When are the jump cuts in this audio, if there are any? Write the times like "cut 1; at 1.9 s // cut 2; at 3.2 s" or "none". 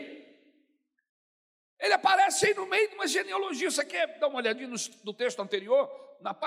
none